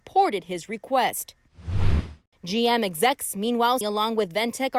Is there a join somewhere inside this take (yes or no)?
yes